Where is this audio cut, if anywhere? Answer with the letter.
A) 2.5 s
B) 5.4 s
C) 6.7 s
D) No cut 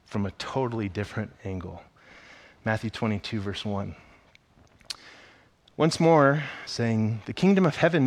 C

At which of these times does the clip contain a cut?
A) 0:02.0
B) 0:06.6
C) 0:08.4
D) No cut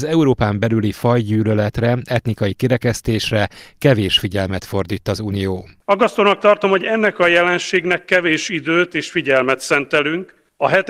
D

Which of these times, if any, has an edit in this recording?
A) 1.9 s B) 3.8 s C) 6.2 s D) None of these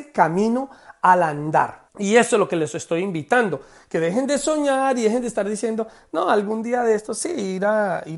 A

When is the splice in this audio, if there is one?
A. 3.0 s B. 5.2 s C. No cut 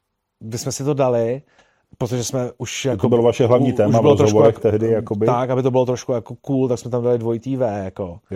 C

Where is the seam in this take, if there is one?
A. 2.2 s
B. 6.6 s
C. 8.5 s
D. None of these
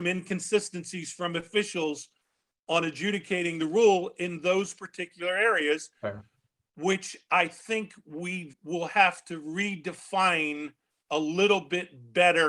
C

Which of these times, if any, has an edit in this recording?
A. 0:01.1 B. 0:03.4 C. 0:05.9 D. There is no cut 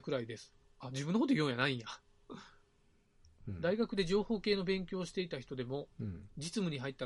B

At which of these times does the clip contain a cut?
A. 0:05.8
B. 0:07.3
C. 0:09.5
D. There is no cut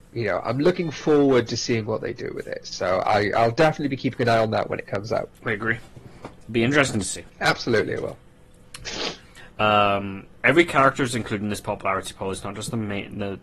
C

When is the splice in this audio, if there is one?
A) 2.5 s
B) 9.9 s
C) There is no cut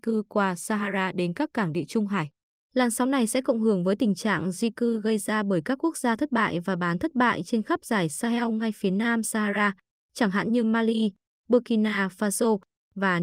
A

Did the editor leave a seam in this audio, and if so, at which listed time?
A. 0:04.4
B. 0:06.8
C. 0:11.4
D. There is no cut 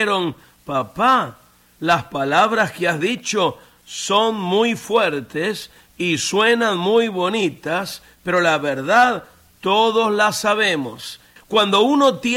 C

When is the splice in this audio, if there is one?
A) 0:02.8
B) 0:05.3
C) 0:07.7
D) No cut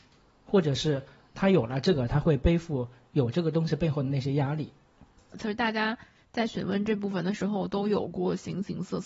B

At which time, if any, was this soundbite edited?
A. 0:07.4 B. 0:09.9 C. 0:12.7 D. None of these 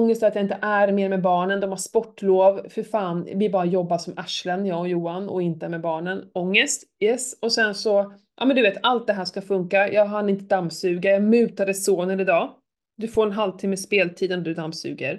D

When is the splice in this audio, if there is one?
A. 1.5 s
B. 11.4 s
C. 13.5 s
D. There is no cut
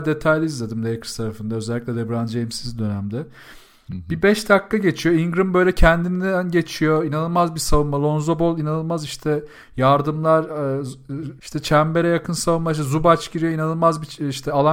B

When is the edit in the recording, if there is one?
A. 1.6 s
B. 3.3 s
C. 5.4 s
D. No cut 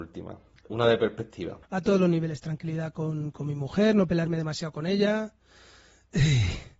A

